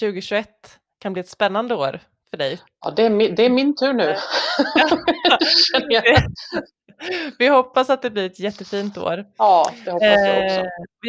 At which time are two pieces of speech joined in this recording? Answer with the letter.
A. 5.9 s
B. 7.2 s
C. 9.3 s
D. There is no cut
D